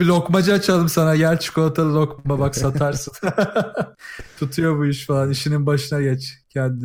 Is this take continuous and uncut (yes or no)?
yes